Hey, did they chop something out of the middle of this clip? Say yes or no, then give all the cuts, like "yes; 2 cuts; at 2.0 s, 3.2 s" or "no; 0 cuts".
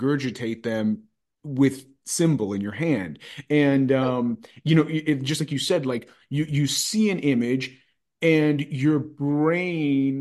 no; 0 cuts